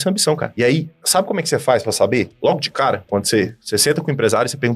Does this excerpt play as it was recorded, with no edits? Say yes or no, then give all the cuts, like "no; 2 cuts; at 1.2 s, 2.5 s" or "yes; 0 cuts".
yes; 0 cuts